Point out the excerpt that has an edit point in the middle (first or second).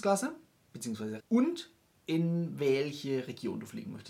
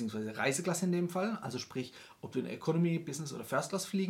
first